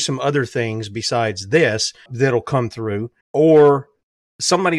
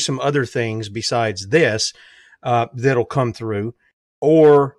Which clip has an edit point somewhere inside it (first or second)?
first